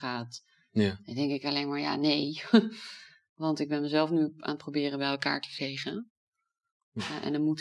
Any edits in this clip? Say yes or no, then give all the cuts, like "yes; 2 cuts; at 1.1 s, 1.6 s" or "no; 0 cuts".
no; 0 cuts